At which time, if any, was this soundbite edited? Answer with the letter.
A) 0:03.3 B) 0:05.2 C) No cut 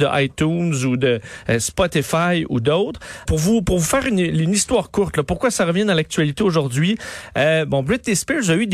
A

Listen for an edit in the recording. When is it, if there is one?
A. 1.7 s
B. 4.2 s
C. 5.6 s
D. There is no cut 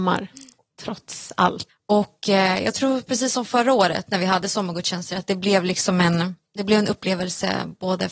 A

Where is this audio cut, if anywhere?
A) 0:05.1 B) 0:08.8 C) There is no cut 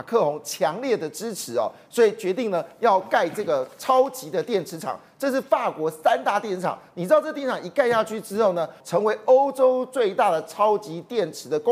B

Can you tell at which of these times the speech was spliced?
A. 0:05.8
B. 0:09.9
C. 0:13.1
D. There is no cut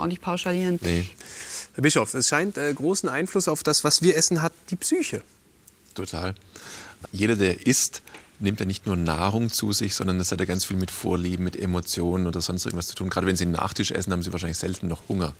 D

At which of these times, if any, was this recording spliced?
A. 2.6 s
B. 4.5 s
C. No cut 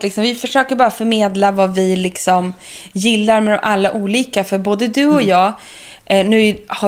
C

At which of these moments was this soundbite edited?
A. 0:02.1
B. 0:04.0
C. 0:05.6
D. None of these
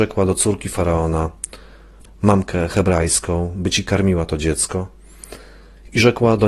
A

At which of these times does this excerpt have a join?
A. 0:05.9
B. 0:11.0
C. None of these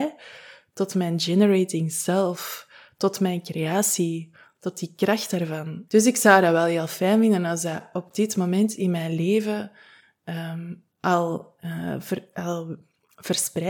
A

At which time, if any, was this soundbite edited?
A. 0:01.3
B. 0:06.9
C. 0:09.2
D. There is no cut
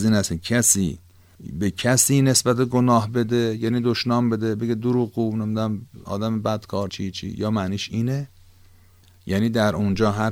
B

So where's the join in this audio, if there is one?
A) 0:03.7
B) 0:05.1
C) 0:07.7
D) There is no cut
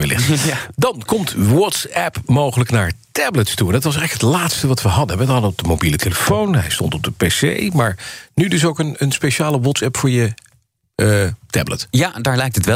D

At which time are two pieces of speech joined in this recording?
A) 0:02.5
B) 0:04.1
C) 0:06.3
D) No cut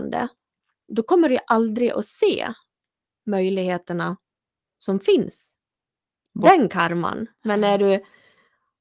C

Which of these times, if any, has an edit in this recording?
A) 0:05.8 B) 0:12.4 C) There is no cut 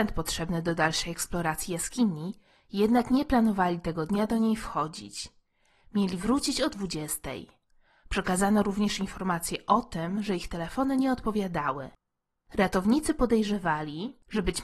C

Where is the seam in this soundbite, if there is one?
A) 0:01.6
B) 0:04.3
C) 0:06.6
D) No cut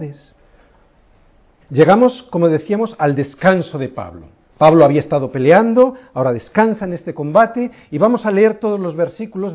A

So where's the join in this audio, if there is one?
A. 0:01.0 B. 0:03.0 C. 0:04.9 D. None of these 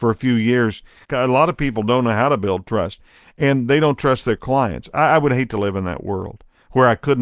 A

